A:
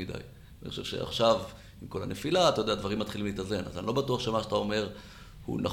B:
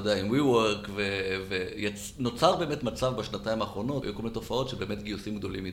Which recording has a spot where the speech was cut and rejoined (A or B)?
B